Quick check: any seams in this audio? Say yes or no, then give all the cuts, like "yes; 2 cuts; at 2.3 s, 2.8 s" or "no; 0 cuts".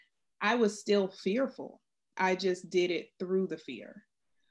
yes; 1 cut; at 2.1 s